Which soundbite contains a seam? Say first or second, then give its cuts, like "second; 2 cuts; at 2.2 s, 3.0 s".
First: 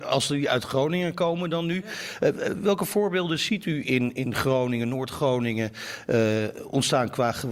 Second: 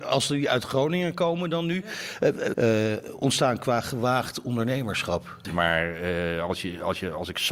second; 2 cuts; at 2.5 s, 5.4 s